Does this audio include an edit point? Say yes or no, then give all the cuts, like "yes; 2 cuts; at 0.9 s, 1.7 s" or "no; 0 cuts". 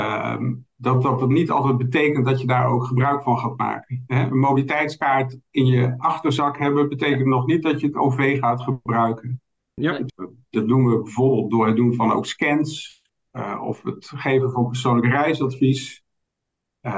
yes; 1 cut; at 10.1 s